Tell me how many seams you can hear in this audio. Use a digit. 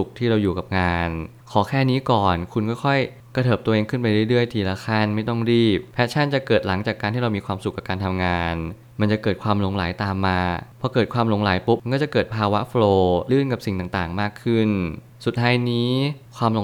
1